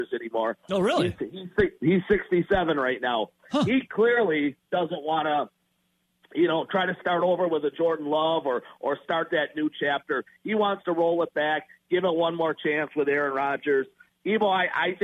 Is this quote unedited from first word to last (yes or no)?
yes